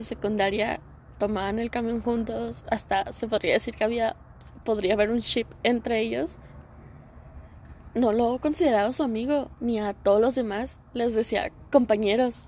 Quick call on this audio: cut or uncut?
uncut